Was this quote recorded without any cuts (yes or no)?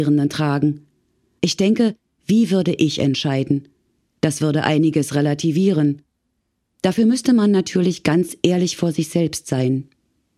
no